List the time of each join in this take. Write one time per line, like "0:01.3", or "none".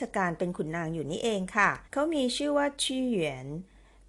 0:01.9